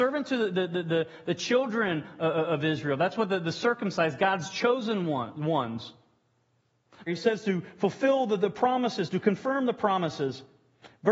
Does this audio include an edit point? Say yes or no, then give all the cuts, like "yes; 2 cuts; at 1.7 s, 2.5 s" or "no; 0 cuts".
yes; 1 cut; at 7.1 s